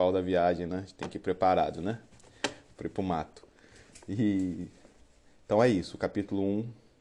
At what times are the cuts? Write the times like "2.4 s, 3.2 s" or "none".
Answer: none

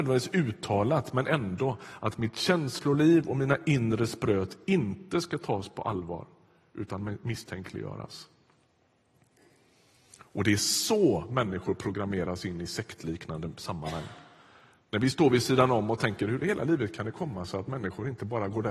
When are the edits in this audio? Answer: none

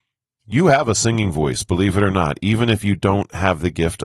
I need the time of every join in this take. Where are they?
none

